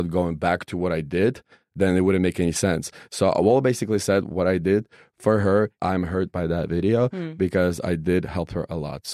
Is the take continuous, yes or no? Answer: no